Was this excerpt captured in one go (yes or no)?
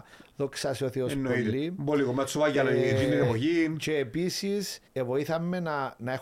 no